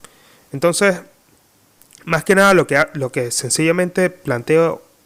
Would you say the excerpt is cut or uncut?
uncut